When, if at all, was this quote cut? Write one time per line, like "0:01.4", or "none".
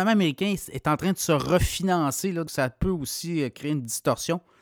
0:02.5